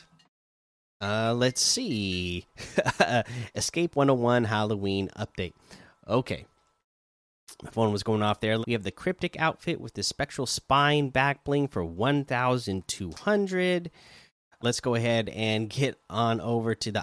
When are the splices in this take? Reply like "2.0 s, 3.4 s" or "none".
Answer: 8.6 s, 14.6 s